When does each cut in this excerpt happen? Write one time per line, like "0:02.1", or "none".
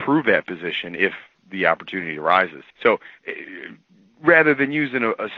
0:02.7